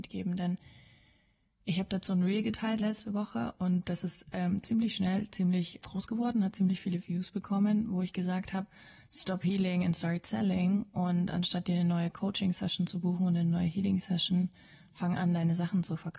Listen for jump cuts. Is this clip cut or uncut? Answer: cut